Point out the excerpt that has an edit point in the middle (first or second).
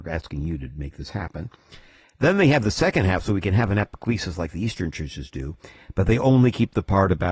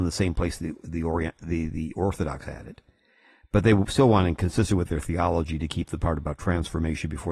first